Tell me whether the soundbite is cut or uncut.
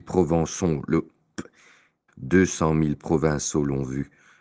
cut